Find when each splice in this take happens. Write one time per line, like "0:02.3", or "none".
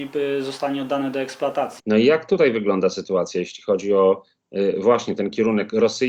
0:01.8